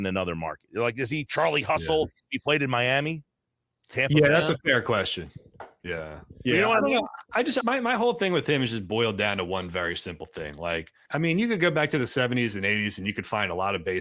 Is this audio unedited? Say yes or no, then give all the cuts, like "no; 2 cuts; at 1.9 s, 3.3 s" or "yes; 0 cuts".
no; 2 cuts; at 7.6 s, 11.1 s